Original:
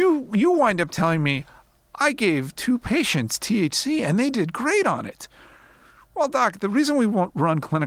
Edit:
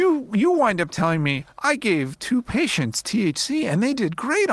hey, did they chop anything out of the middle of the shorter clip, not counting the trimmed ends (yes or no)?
yes